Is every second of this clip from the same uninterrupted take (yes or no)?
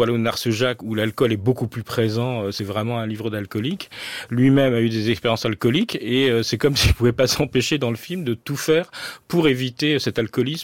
yes